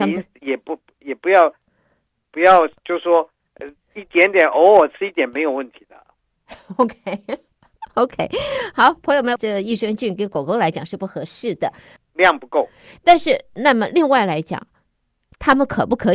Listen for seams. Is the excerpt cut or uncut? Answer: cut